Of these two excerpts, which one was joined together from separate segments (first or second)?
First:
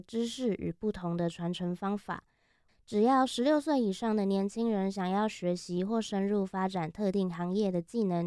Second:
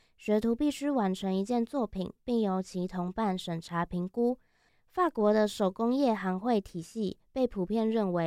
first